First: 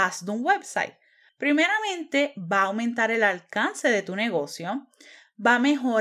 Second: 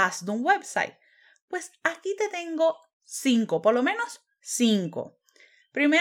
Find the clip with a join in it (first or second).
first